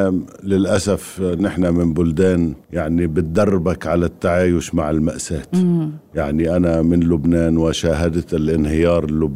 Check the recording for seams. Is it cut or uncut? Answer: cut